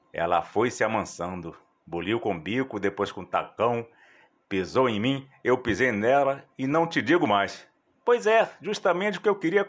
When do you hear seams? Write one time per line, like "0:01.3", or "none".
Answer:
none

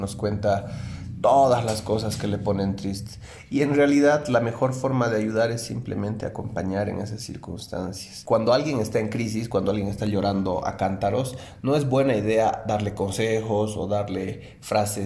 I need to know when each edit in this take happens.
none

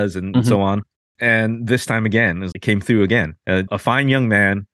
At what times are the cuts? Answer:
0:01.2
0:02.5
0:03.7

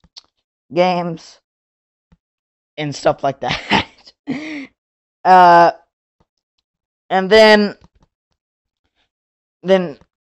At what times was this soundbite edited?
none

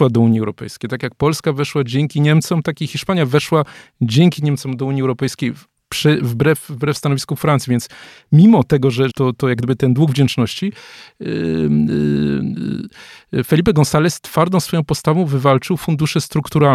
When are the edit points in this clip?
0:09.1

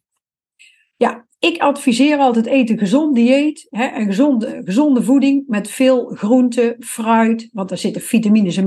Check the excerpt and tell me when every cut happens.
none

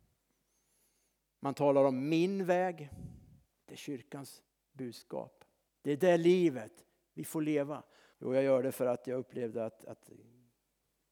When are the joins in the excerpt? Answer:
0:03.6
0:05.7
0:08.1

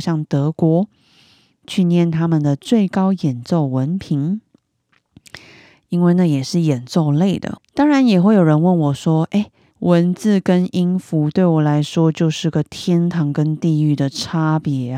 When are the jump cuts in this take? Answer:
0:07.6
0:09.7

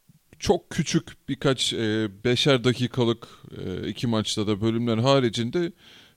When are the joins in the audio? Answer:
none

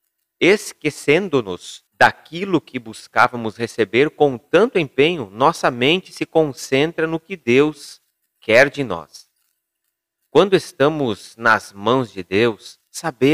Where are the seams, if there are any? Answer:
0:01.9

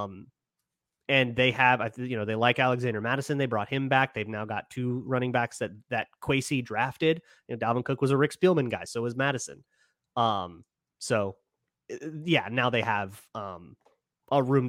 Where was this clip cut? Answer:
none

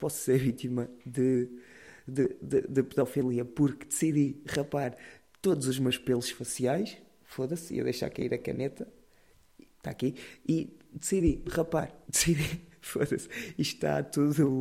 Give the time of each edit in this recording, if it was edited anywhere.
0:12.1

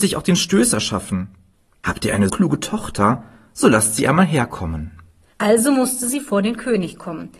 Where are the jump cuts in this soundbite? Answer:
0:02.3

